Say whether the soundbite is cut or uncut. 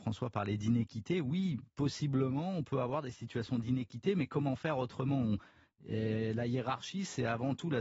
uncut